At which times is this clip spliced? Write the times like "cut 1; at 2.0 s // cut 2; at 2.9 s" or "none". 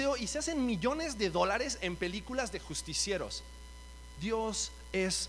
cut 1; at 4.1 s